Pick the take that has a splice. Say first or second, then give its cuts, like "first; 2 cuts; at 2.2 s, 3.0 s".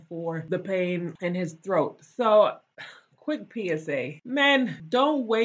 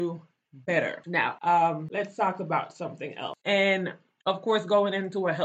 second; 1 cut; at 3.4 s